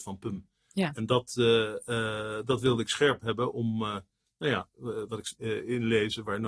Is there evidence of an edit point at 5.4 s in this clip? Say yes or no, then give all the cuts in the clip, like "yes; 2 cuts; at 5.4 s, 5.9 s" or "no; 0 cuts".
yes; 1 cut; at 5.4 s